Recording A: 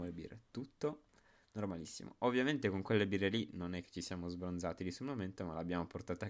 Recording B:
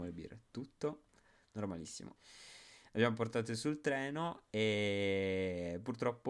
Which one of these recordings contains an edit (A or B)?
B